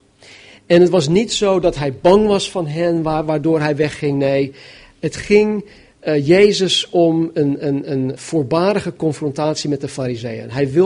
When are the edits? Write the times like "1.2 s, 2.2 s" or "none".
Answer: 8.2 s